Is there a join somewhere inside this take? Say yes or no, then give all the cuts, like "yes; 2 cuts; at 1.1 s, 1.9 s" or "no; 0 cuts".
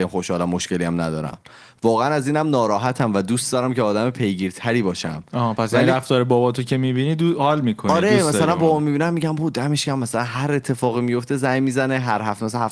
no; 0 cuts